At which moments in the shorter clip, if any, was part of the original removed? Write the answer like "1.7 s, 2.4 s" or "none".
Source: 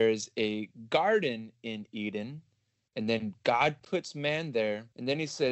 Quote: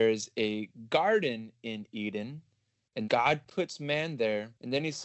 3.0 s